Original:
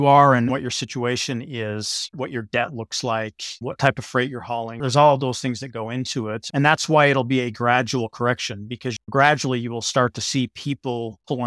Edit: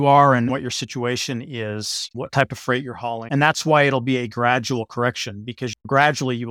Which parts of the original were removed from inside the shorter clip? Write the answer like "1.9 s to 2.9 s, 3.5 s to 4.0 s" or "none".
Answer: 2.1 s to 3.6 s, 4.7 s to 6.5 s